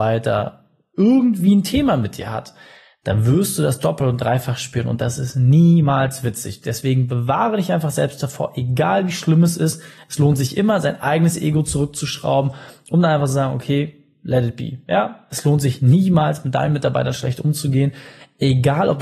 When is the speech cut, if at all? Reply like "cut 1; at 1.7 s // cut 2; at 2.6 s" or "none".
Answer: none